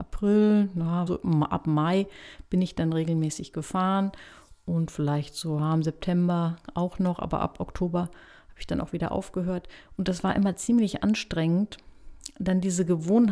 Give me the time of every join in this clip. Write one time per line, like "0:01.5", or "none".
0:01.1